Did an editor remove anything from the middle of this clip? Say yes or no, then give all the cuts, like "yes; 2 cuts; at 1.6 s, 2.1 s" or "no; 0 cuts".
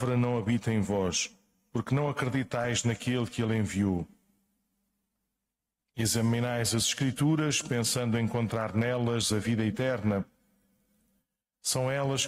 no; 0 cuts